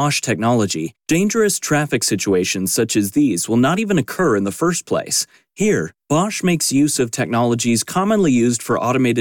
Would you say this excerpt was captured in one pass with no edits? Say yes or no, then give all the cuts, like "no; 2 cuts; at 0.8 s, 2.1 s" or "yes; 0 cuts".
yes; 0 cuts